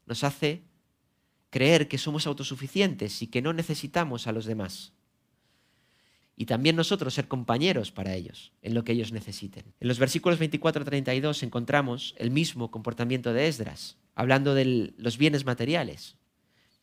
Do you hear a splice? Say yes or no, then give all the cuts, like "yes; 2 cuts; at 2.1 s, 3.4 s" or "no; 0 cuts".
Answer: yes; 3 cuts; at 6.2 s, 9.7 s, 14.1 s